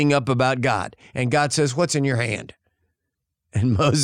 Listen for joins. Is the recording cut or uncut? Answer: uncut